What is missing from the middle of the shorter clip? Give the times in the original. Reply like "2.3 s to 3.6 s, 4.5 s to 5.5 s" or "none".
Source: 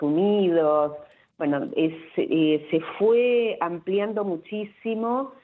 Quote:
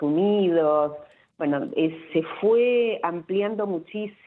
2.1 s to 2.7 s